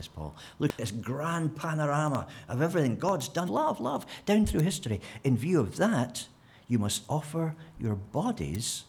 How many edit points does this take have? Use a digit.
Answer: 1